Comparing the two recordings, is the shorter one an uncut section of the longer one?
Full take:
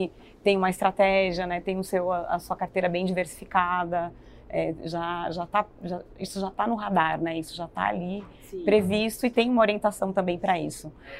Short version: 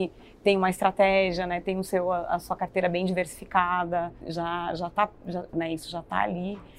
no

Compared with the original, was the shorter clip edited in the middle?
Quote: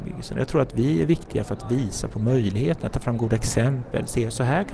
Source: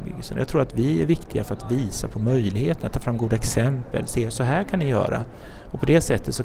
no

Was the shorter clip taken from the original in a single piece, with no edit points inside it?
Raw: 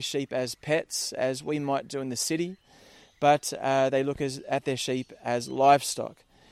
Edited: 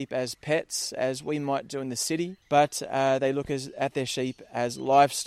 no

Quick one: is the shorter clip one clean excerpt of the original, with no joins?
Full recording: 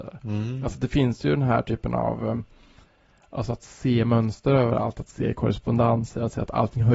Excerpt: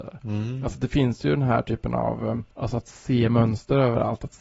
no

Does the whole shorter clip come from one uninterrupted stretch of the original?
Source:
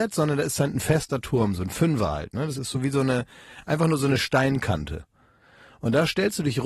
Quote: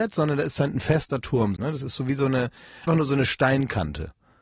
no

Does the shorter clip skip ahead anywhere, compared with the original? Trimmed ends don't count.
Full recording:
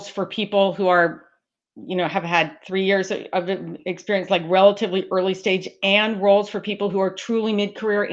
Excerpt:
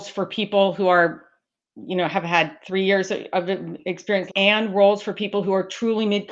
yes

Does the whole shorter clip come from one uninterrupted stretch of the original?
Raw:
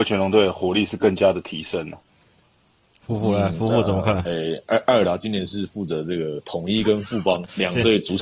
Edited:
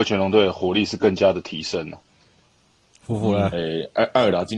no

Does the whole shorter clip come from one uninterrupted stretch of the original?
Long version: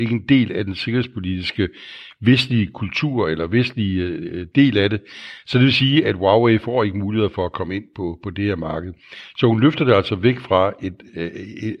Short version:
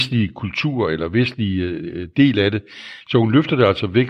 no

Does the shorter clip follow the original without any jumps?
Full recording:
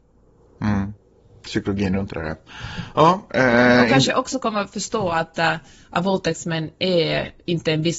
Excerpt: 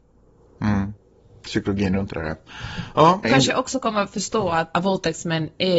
no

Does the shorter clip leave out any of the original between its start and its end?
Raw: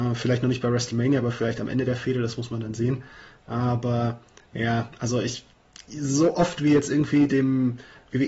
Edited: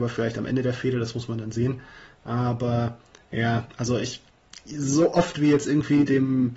no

